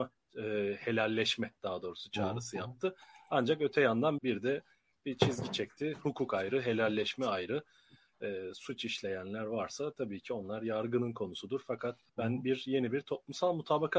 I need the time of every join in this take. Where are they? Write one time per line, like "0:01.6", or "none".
0:04.2
0:12.1